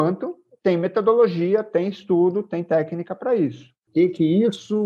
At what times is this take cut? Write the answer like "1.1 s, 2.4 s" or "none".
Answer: 3.9 s